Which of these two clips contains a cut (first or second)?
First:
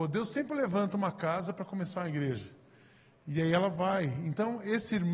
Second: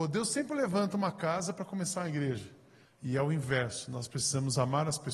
second